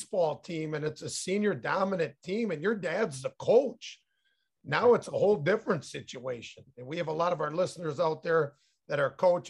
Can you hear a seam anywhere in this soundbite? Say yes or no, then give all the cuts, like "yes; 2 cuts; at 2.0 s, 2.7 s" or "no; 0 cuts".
no; 0 cuts